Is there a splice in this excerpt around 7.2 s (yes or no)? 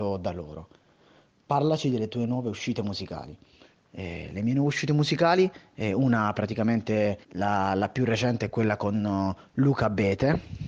yes